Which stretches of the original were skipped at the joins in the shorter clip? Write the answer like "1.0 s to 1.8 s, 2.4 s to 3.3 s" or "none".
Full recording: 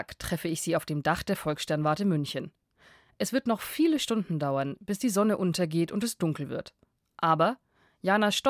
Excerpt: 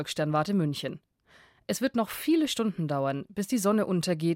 none